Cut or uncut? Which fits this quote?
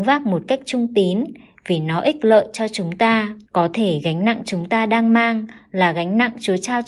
cut